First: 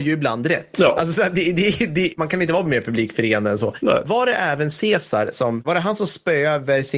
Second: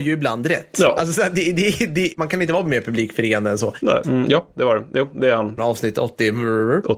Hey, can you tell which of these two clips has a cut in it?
second; 2 cuts; at 4.0 s, 5.6 s

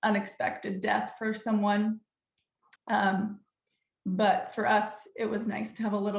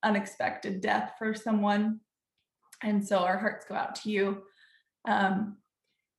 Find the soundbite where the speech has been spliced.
first; 1 cut; at 2.8 s

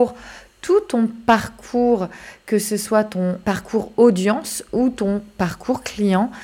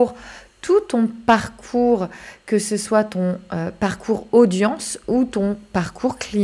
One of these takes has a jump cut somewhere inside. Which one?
first; 1 cut; at 3.4 s

